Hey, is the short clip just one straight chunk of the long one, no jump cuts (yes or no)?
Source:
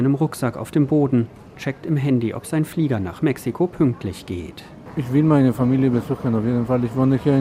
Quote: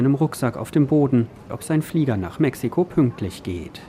no